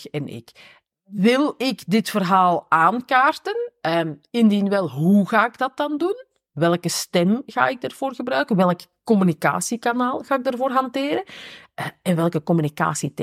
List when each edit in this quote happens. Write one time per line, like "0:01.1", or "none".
none